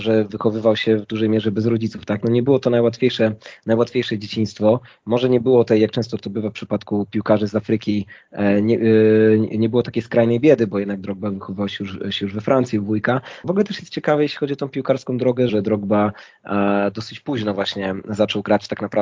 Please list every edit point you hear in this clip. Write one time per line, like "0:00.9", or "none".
0:13.4
0:15.5

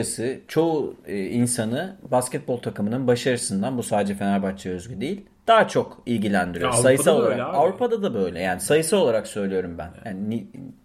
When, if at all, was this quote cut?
none

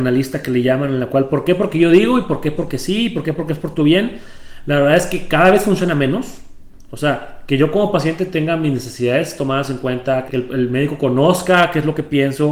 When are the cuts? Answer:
0:06.9
0:10.3

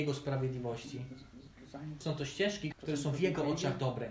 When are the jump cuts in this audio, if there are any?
0:02.7

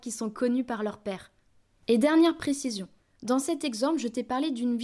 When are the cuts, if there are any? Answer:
0:01.7

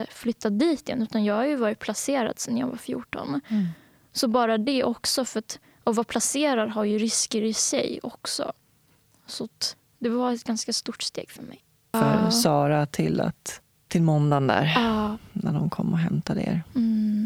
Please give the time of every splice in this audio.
0:11.9

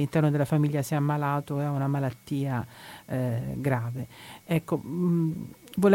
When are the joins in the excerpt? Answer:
none

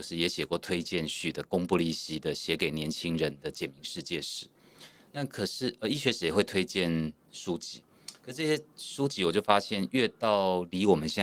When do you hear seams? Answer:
none

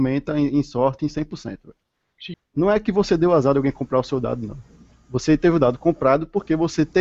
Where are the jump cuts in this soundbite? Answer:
0:02.3

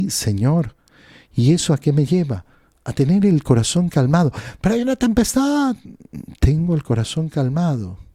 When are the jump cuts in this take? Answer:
none

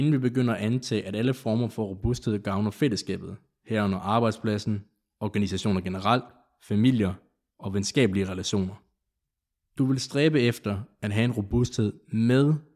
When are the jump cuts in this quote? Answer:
none

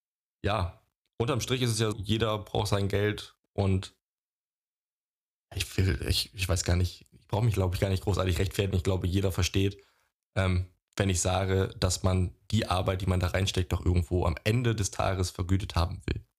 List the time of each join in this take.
0:01.9

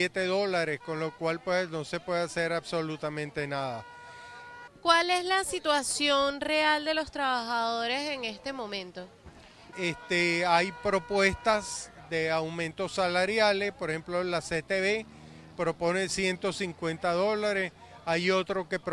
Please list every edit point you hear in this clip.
0:04.7
0:09.7

